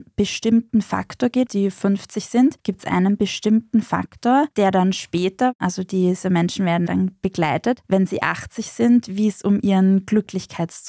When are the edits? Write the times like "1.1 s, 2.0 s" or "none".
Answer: 1.5 s